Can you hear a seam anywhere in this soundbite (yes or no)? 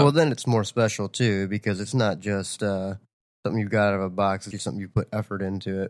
yes